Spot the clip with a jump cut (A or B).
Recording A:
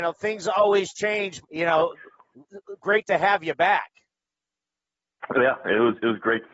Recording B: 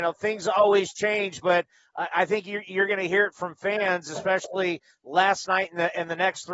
A